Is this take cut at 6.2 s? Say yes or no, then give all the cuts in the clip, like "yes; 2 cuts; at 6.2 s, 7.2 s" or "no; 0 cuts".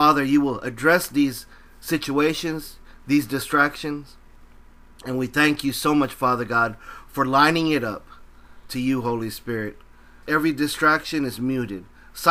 no; 1 cut; at 10.2 s